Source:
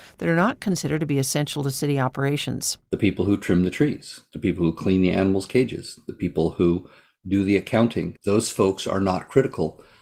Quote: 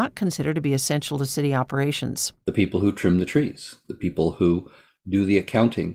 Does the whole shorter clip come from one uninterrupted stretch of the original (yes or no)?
no